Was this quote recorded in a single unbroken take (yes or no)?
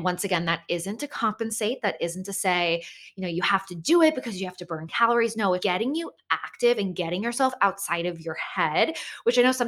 no